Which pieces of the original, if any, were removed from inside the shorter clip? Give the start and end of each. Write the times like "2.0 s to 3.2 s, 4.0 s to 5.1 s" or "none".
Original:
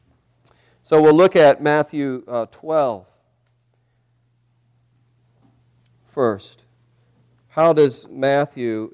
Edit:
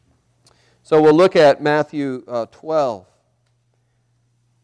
none